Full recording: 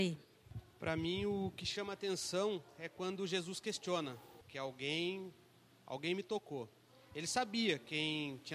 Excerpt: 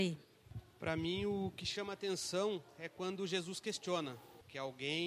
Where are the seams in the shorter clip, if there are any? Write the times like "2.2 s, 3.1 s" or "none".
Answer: none